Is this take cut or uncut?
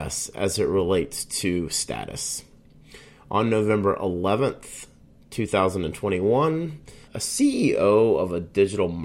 cut